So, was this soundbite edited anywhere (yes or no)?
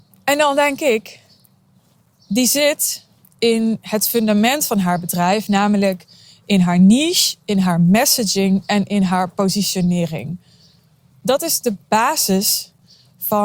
no